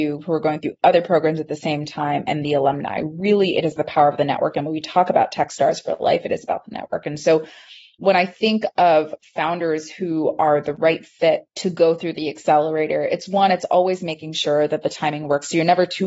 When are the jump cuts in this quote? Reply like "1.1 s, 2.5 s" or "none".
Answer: none